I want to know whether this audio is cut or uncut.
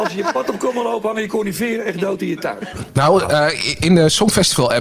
cut